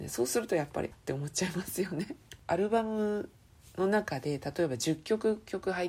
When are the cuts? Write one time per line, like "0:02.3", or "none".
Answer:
0:00.9